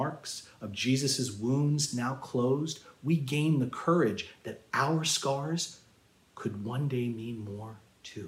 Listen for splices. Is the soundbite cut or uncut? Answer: uncut